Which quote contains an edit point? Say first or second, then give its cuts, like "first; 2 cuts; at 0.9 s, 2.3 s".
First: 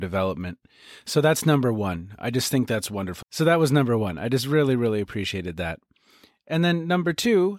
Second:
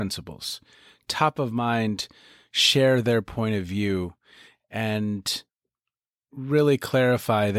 first; 1 cut; at 3.2 s